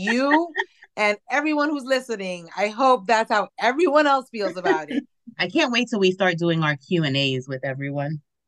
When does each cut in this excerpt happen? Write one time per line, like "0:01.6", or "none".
0:05.3